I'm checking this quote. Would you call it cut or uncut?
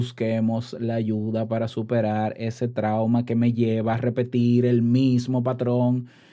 uncut